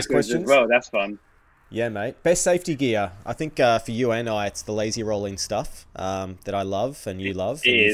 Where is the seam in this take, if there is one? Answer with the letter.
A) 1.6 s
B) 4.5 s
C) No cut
C